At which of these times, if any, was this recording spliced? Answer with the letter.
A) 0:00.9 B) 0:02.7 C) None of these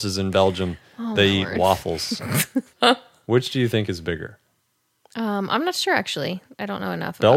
B